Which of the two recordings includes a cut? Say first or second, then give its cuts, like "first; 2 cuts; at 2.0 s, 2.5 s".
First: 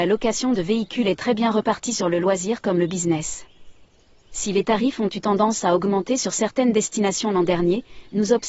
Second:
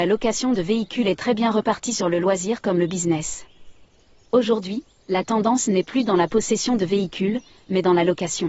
first; 1 cut; at 4.2 s